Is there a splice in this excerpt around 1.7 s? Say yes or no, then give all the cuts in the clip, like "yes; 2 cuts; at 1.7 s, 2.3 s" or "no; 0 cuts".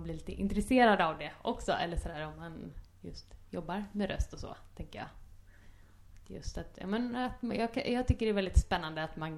no; 0 cuts